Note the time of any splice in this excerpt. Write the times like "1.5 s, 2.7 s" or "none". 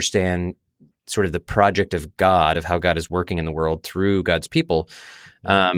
none